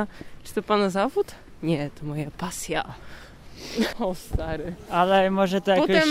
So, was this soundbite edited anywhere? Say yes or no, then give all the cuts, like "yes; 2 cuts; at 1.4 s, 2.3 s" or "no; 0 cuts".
yes; 1 cut; at 3.9 s